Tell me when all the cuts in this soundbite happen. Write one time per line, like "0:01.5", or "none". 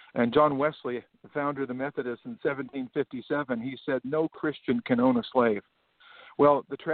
none